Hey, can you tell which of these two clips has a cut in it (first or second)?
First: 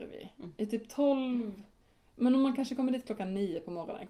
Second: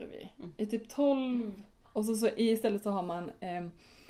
second